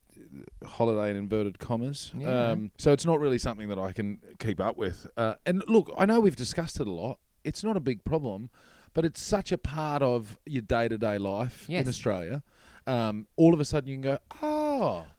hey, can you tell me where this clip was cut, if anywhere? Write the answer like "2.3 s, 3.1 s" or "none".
2.7 s